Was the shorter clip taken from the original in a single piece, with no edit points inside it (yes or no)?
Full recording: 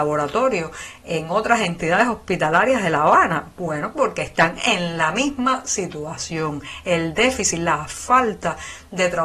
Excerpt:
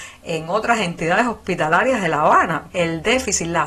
no